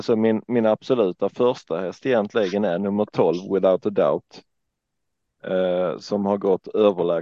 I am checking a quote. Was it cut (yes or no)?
no